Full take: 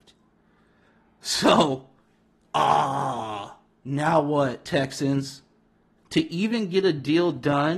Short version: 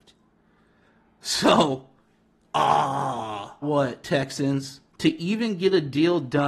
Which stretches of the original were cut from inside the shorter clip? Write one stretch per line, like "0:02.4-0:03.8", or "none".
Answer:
0:03.6-0:04.2
0:05.5-0:06.0